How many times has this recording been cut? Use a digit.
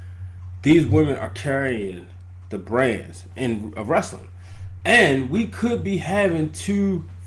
0